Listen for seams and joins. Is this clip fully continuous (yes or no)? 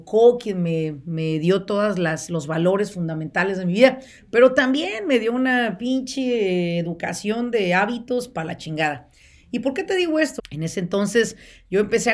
no